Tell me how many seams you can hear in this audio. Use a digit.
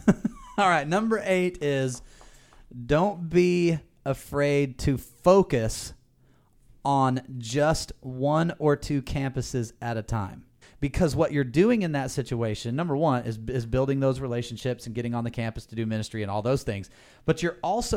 1